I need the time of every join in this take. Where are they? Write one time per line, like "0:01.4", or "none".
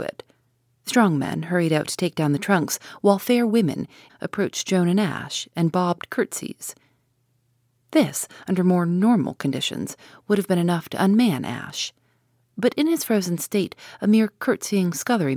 0:04.1